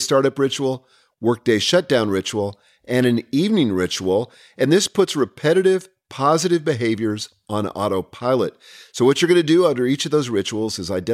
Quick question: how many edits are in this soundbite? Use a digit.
0